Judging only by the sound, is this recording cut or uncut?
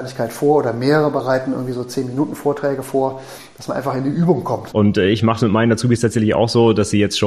cut